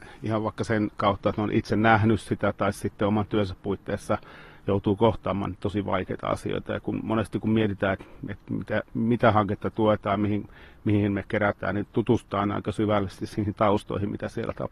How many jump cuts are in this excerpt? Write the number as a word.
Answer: zero